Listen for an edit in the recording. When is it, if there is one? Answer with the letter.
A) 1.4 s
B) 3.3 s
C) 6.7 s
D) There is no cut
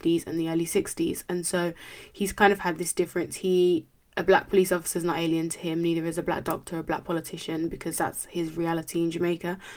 D